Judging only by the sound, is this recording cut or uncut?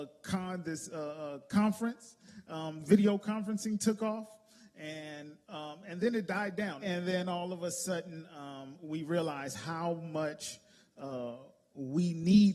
cut